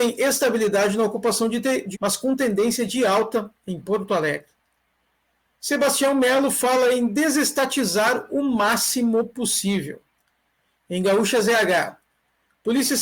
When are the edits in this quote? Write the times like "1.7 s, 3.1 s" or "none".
1.9 s